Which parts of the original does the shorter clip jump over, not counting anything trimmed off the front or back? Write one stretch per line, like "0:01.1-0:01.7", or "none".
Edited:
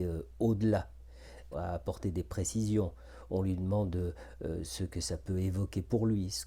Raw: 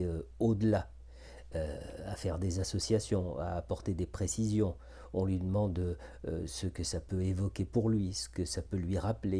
0:01.5-0:03.3